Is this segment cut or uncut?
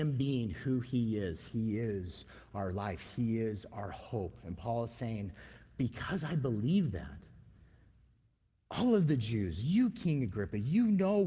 uncut